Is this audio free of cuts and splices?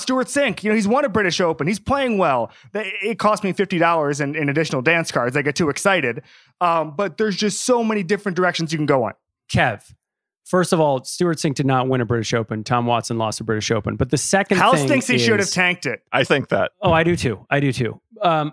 no; 1 cut; at 16.2 s

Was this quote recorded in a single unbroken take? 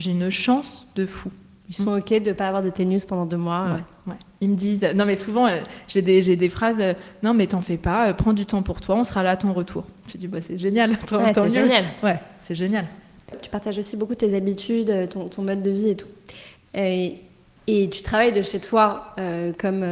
yes; 0 cuts

